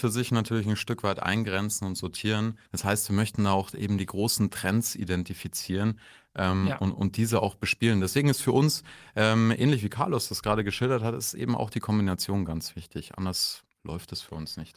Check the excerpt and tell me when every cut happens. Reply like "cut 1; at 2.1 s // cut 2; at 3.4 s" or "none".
cut 1; at 2.7 s